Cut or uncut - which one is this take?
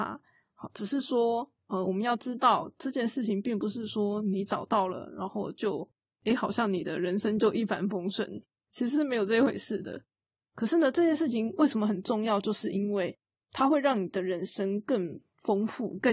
uncut